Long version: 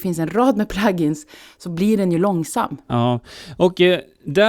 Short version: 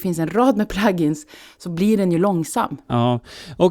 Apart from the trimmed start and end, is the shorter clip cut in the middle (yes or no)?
no